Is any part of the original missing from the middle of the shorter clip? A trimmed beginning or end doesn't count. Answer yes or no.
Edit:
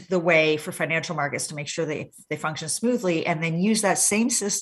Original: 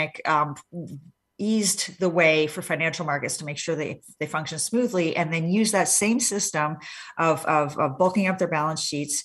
no